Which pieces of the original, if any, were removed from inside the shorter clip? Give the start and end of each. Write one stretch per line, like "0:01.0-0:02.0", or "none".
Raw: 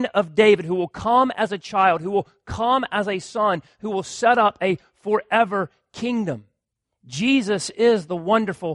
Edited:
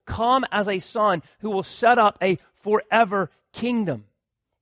none

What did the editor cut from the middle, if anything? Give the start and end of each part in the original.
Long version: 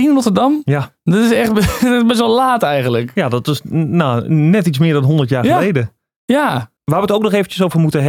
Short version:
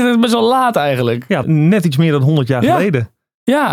0:03.3-0:04.2

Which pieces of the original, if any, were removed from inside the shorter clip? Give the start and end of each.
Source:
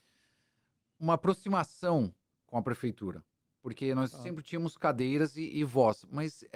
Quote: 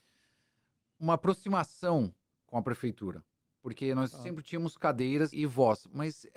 0:05.3-0:05.5

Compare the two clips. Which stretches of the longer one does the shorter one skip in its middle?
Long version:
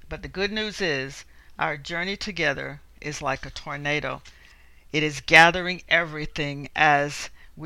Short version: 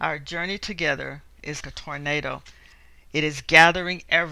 0:03.2-0:03.4

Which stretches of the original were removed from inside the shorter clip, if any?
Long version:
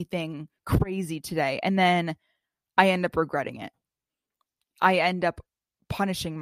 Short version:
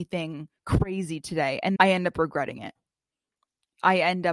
0:01.8-0:02.7

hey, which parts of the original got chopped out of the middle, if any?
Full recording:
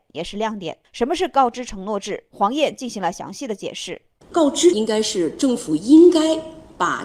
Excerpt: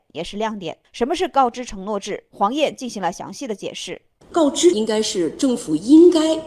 none

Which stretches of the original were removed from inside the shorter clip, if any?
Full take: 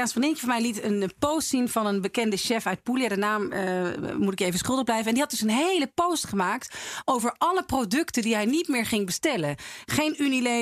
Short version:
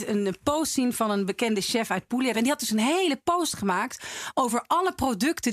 0:03.1-0:05.0

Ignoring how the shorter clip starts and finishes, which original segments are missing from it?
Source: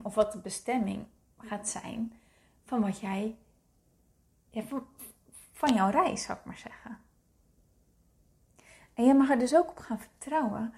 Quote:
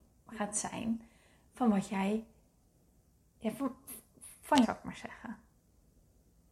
0:05.7-0:06.2

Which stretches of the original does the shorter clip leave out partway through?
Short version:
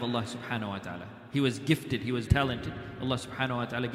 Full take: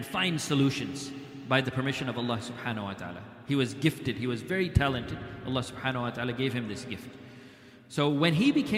0:04.4-0:04.7

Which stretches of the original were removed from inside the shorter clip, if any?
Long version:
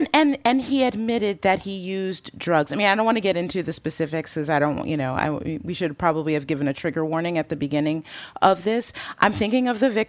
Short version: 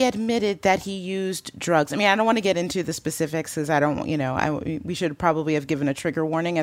none

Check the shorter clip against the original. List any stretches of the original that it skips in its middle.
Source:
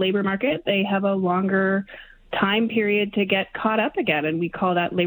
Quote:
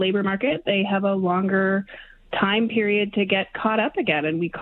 none

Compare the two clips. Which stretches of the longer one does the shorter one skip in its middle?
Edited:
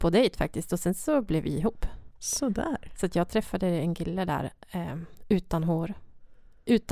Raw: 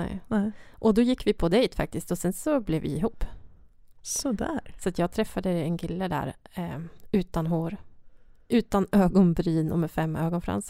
0:03.5-0:03.9

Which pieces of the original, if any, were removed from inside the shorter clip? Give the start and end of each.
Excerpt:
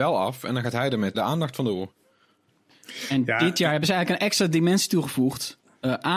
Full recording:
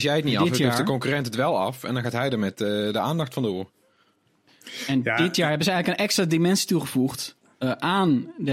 0:02.5-0:02.9

